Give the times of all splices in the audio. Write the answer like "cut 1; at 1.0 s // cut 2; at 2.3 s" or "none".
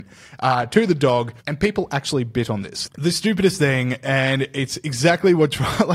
cut 1; at 1.4 s // cut 2; at 2.9 s